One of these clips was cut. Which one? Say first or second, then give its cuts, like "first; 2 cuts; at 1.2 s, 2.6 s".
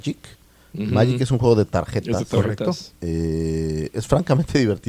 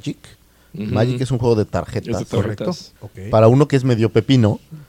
second; 1 cut; at 3.0 s